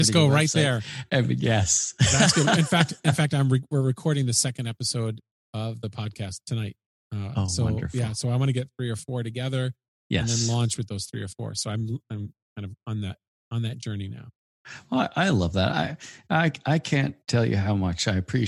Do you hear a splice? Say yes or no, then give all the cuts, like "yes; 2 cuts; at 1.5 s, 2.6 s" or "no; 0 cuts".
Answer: no; 0 cuts